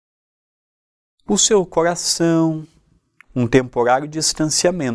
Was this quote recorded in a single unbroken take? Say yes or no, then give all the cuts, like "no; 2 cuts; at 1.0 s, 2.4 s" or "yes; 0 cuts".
no; 1 cut; at 3.2 s